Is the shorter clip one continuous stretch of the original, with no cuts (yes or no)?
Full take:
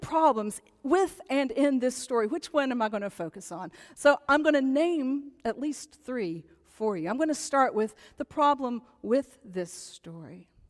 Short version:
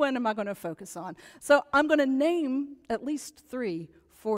yes